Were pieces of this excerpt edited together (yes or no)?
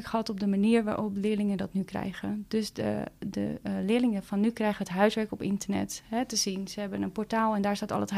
no